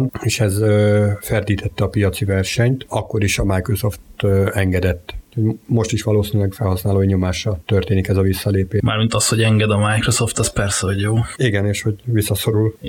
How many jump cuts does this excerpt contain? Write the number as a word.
zero